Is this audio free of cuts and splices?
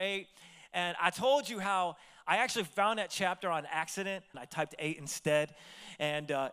no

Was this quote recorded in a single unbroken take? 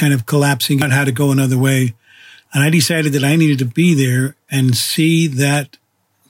yes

